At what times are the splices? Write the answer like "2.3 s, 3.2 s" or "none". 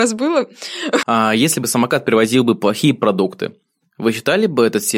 1.0 s